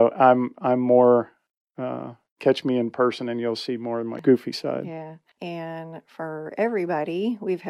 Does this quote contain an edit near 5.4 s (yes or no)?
yes